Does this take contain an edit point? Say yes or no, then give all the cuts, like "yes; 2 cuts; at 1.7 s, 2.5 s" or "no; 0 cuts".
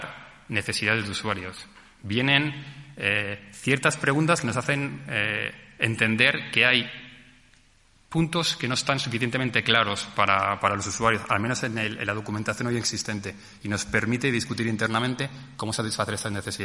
no; 0 cuts